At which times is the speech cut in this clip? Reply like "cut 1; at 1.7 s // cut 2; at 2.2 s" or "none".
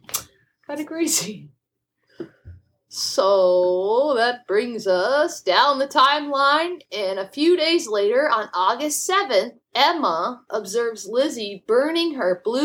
none